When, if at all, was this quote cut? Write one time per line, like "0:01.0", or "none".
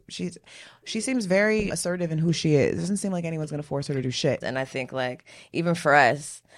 0:01.7
0:04.4